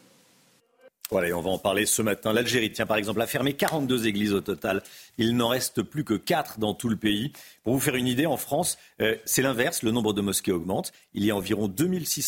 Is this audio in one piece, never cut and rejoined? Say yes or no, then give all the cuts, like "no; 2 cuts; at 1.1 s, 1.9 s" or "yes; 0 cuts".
yes; 0 cuts